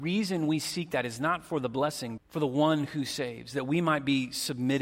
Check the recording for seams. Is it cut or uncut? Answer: cut